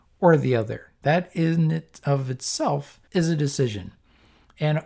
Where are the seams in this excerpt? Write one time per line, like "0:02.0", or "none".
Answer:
0:01.0
0:03.1